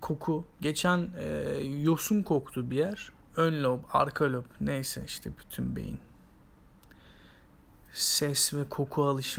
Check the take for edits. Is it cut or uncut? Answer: cut